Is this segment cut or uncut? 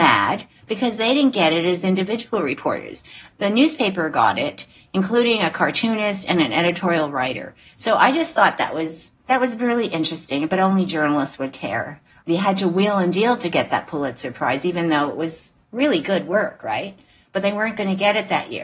uncut